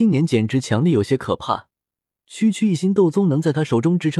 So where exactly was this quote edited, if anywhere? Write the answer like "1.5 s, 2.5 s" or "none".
none